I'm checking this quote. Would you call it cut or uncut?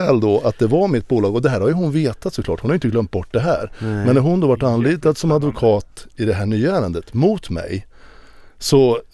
uncut